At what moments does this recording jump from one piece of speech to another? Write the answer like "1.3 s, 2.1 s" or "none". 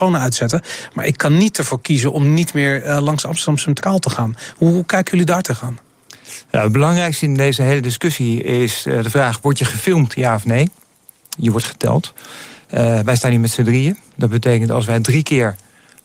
11.3 s